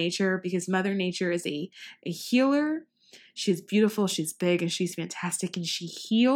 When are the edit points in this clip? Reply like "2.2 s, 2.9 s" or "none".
none